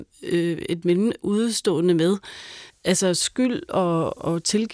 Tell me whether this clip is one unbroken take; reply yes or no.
no